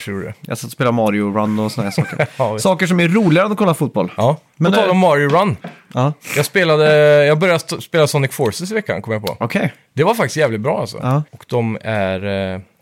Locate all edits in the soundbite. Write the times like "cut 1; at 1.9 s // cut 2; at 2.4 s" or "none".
cut 1; at 11.3 s